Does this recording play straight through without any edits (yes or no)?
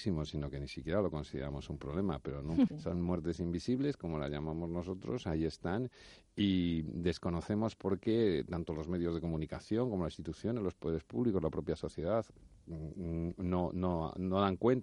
no